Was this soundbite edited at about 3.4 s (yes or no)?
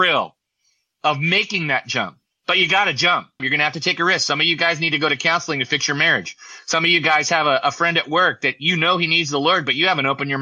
yes